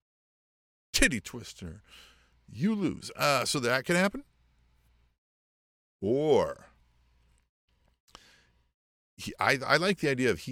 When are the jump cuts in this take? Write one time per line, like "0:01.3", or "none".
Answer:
none